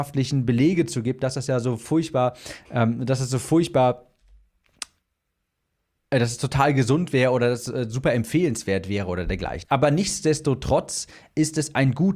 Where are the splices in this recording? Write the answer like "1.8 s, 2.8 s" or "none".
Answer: 9.6 s